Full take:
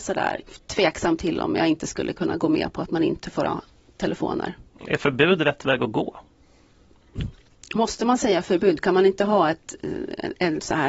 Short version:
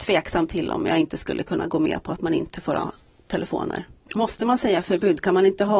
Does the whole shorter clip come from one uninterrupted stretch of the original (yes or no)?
no